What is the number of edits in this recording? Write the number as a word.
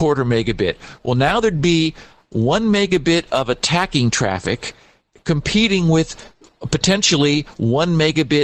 zero